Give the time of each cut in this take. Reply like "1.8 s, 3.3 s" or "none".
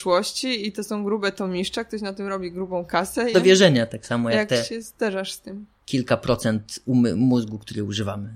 3.3 s